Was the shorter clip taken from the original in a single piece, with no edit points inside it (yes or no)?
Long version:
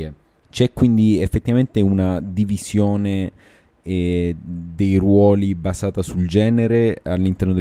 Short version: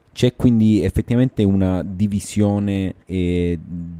no